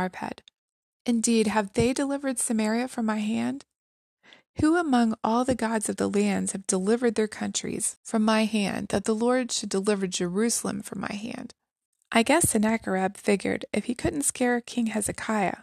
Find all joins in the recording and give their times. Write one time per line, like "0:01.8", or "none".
0:00.9